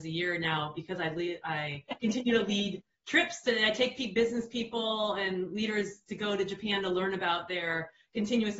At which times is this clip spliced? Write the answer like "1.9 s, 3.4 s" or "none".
none